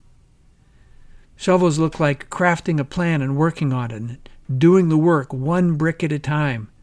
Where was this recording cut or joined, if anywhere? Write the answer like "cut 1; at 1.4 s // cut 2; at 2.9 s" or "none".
cut 1; at 1.2 s